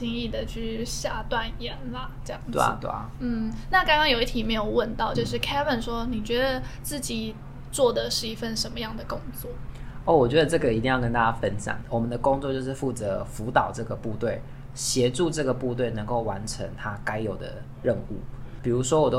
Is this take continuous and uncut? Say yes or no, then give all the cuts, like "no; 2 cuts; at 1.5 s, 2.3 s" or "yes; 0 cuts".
no; 2 cuts; at 5.1 s, 11.8 s